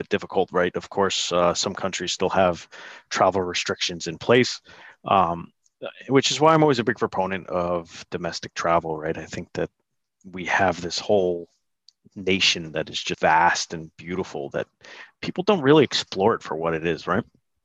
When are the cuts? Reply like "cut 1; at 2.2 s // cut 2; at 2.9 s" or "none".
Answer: cut 1; at 13.1 s